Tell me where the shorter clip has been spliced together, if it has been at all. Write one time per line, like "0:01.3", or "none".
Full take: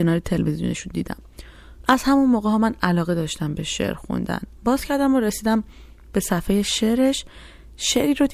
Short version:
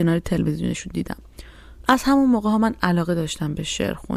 none